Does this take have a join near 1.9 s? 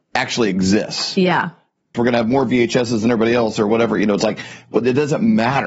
yes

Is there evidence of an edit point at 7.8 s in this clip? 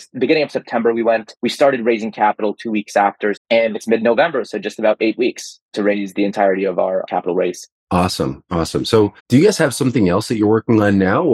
no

